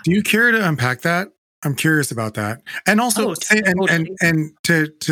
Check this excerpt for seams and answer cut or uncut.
uncut